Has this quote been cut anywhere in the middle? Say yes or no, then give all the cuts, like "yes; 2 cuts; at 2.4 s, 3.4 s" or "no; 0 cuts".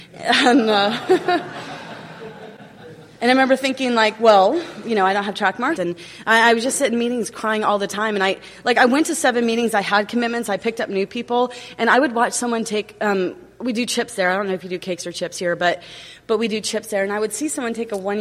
yes; 1 cut; at 5.8 s